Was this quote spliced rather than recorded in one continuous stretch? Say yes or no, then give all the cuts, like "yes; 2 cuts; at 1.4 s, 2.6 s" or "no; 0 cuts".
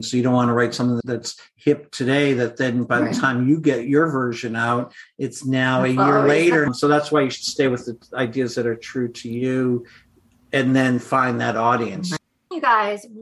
no; 0 cuts